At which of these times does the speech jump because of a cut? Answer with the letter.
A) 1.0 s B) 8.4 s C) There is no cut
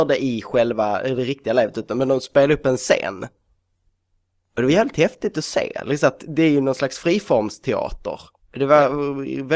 B